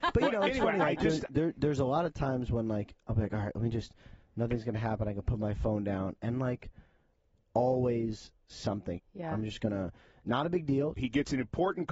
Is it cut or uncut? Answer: cut